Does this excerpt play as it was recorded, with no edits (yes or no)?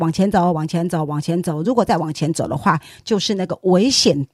yes